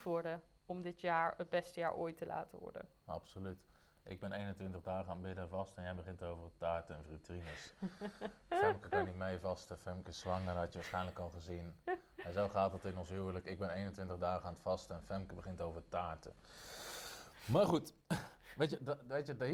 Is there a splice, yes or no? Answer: no